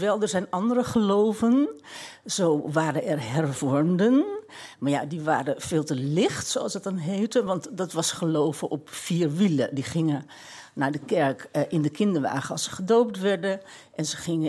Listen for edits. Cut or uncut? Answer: uncut